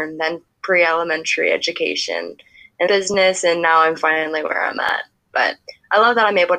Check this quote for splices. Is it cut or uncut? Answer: cut